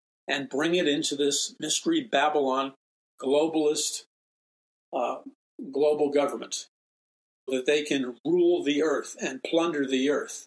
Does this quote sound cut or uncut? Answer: cut